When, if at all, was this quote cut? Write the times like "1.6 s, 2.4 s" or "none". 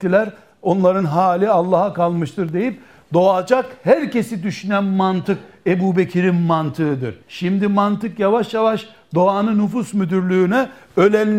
7.2 s

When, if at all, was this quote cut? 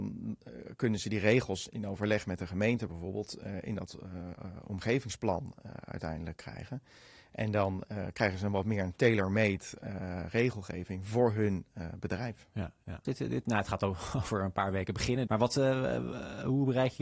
13.0 s, 15.3 s

